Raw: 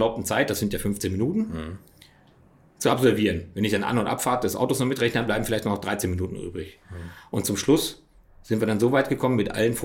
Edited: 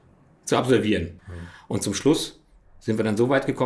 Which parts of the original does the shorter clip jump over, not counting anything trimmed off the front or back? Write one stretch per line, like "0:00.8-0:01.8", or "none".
0:03.5-0:06.8